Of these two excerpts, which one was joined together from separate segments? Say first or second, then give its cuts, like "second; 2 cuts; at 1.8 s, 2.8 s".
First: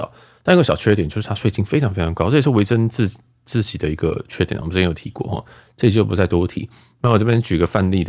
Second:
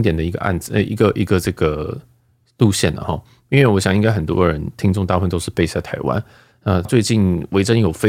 second; 1 cut; at 6.9 s